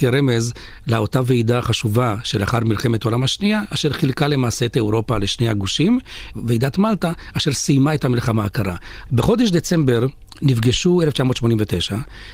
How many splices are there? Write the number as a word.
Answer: two